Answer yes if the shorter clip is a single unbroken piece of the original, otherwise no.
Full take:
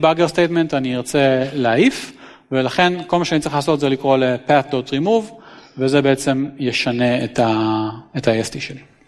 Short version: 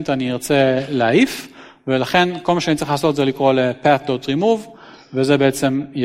yes